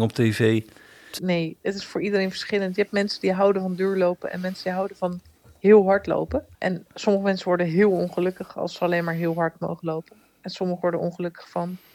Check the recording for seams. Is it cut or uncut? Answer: cut